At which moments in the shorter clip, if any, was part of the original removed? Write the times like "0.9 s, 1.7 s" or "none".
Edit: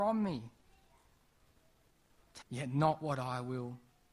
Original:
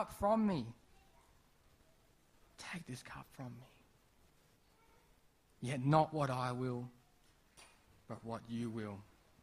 2.4 s